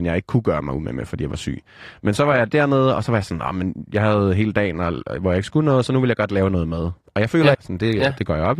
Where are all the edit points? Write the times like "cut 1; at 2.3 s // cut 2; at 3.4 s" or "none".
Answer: cut 1; at 7.5 s